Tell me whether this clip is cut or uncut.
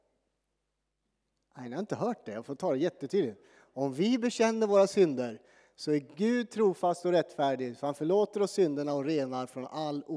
uncut